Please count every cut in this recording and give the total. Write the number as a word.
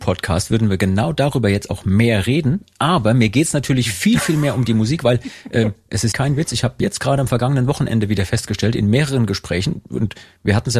one